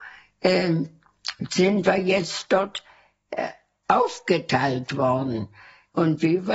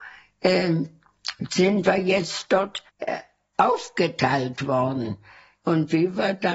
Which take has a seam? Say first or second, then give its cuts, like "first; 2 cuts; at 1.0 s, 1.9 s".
second; 1 cut; at 2.9 s